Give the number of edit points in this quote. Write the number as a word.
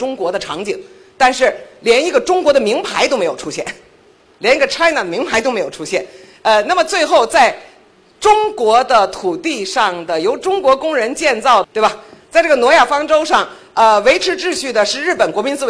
one